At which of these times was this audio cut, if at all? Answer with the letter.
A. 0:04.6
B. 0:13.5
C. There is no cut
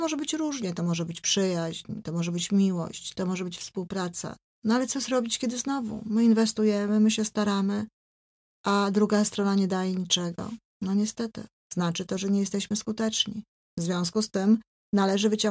C